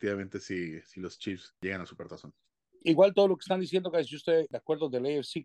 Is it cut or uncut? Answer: uncut